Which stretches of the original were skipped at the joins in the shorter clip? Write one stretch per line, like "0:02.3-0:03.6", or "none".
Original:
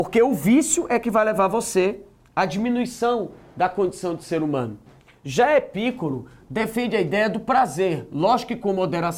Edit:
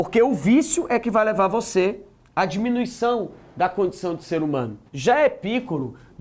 0:04.9-0:05.2